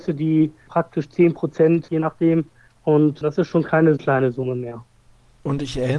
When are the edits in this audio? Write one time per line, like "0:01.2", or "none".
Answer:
0:01.9
0:04.0